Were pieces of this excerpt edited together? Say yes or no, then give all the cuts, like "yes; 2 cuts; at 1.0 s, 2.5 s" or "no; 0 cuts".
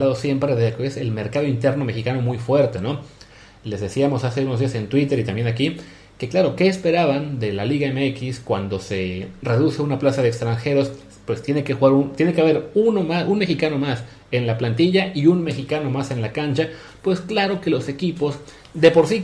no; 0 cuts